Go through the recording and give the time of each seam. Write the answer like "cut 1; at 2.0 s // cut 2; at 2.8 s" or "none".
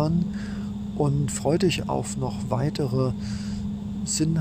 cut 1; at 1.8 s